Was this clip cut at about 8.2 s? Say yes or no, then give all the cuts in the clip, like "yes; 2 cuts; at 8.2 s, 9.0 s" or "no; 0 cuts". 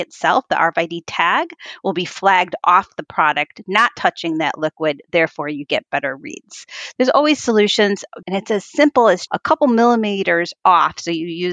yes; 2 cuts; at 8.2 s, 9.3 s